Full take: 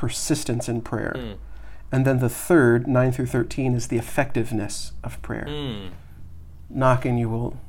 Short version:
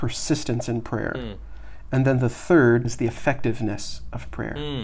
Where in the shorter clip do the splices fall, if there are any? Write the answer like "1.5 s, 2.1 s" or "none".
2.8 s